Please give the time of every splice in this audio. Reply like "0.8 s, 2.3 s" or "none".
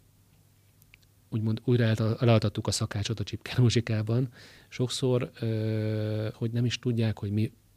4.6 s, 6.3 s